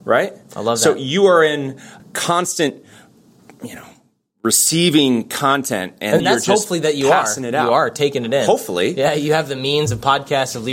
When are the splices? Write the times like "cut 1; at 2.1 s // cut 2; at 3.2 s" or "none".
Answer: cut 1; at 2.0 s // cut 2; at 6.2 s